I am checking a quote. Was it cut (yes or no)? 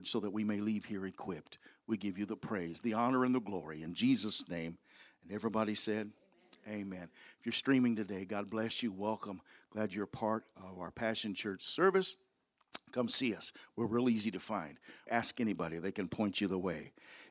yes